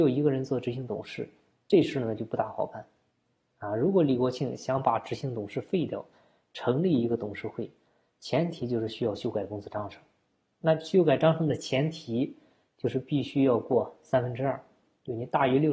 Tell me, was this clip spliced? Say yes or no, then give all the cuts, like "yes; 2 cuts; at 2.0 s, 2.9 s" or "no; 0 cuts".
no; 0 cuts